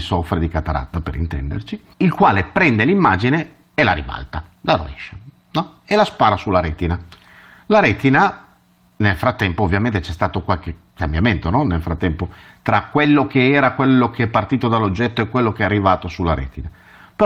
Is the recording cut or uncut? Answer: cut